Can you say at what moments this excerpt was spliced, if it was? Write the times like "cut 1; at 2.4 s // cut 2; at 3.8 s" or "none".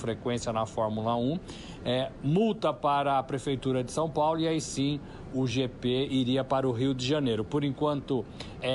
cut 1; at 5.3 s